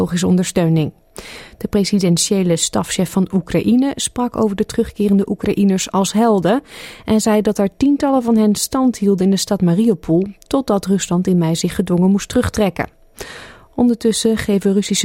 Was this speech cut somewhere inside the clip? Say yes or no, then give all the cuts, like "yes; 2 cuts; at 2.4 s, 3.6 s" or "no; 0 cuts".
no; 0 cuts